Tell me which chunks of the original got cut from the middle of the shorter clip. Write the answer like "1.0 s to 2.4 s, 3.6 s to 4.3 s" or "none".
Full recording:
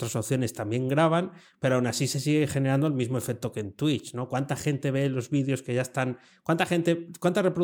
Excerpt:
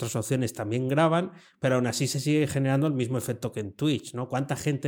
none

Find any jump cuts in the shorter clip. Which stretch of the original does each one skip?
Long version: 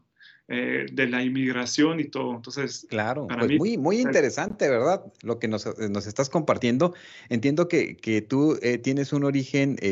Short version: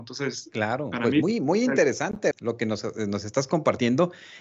4.7 s to 5.1 s

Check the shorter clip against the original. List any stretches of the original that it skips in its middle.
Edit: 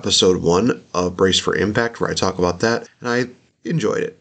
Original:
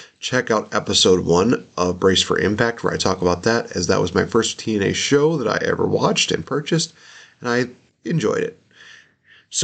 3.7 s to 7.3 s

